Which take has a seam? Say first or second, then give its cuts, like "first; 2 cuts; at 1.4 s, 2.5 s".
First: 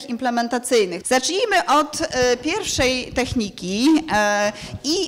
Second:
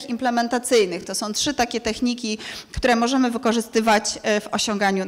first; 1 cut; at 1.0 s